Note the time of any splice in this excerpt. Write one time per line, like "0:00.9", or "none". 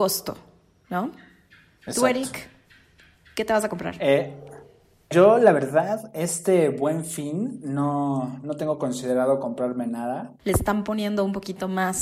0:05.1
0:10.4